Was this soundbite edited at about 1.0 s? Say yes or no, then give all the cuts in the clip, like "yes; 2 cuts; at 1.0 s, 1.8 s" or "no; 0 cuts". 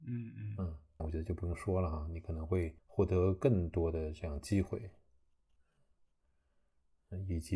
yes; 2 cuts; at 1.0 s, 2.8 s